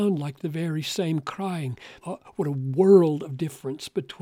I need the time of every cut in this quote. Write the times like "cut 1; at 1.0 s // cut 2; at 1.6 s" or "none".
cut 1; at 2.0 s